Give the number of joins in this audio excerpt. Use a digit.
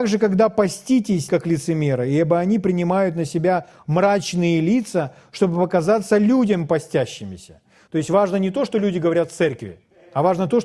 2